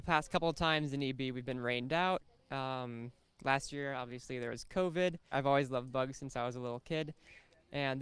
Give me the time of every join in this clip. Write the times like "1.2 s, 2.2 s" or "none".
5.3 s